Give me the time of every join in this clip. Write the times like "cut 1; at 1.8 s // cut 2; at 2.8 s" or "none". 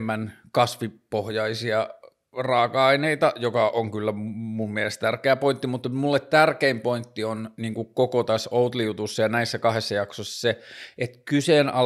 none